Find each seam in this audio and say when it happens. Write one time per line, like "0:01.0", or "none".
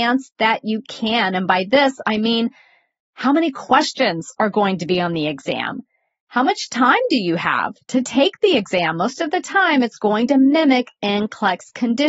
none

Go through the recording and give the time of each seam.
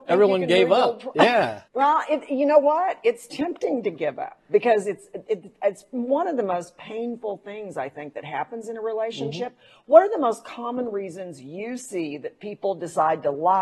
0:01.7

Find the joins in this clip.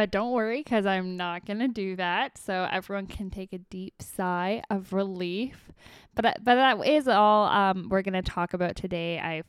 none

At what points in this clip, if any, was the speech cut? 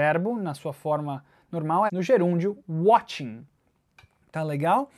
0:01.9

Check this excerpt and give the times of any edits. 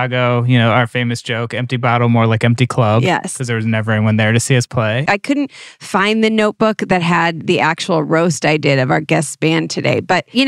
0:05.1

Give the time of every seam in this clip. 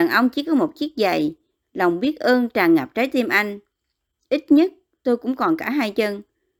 0:01.6

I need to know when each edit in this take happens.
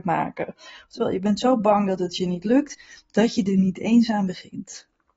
none

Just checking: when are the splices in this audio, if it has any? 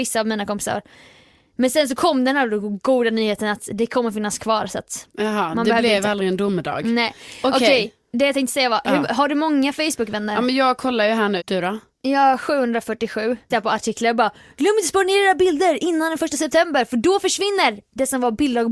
0:11.4
0:13.5

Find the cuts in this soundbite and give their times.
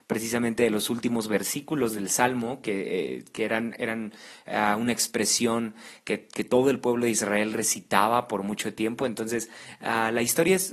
none

